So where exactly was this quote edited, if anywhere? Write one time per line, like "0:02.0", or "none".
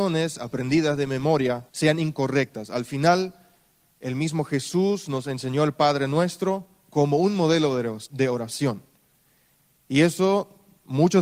0:01.7